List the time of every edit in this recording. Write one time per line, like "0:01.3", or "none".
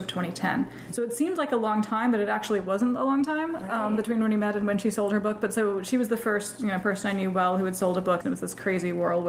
0:08.2